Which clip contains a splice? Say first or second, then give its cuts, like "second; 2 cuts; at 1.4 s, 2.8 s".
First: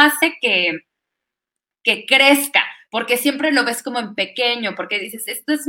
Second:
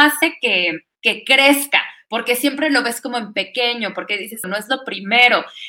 second; 2 cuts; at 1.0 s, 4.4 s